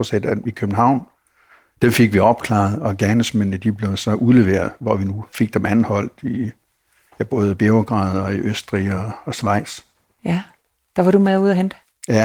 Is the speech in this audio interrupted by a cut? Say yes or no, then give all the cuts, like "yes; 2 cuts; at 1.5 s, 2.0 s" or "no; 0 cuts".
no; 0 cuts